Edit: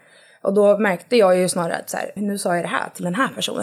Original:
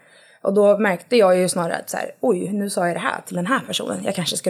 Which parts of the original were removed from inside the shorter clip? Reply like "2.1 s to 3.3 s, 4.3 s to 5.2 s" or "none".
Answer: 2.2 s to 2.5 s